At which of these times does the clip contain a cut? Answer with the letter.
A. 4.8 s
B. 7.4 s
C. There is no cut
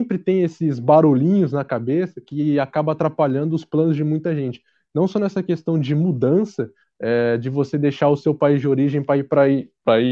C